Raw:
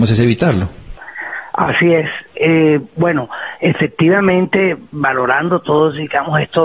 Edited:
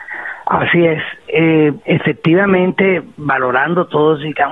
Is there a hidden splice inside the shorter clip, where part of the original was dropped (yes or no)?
yes